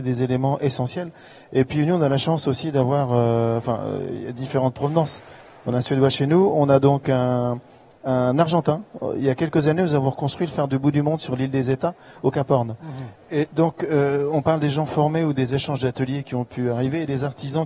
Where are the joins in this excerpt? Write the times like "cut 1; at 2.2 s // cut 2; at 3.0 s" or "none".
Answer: cut 1; at 13.2 s